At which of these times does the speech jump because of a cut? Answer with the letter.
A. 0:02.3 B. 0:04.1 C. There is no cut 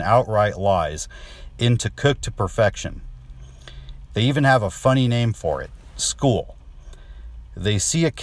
B